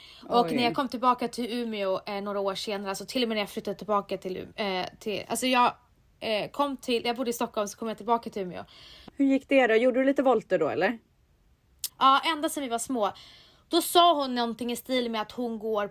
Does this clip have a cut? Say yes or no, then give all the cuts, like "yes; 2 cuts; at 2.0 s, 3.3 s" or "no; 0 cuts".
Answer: yes; 2 cuts; at 9.1 s, 11.9 s